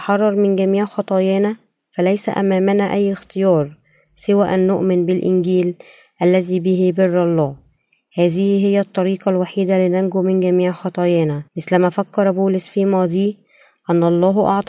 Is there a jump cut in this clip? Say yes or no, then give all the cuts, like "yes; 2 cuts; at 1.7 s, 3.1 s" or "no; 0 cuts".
yes; 1 cut; at 11.5 s